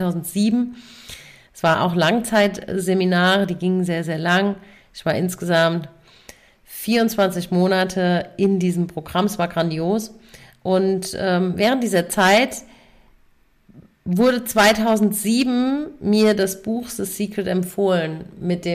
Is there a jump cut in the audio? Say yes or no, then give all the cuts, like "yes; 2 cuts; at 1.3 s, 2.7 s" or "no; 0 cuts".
no; 0 cuts